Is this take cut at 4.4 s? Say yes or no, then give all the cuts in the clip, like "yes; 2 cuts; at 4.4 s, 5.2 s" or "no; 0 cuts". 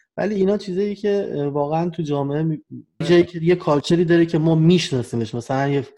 no; 1 cut; at 3.0 s